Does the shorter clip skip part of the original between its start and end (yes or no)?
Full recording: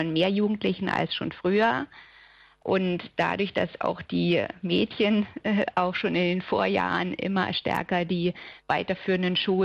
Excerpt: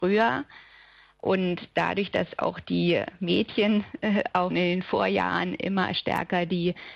yes